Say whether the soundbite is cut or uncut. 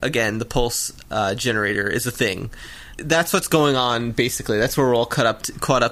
cut